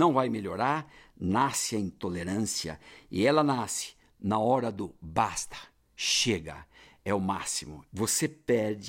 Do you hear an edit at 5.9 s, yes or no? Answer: no